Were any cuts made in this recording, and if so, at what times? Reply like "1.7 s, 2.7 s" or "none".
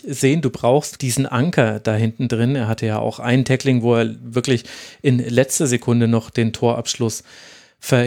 1.0 s